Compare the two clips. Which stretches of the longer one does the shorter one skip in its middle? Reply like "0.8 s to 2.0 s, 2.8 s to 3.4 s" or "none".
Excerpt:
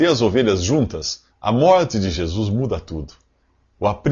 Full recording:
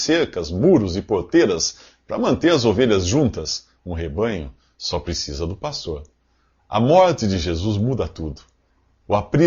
3.7 s to 6.6 s